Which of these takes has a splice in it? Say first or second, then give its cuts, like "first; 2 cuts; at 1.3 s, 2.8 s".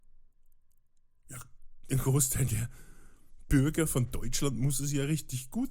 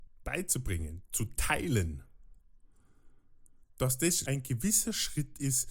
second; 1 cut; at 4.2 s